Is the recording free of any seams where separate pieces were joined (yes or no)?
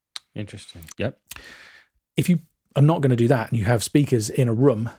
no